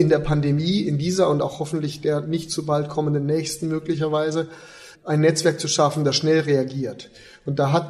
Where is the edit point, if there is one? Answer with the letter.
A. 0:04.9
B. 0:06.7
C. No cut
A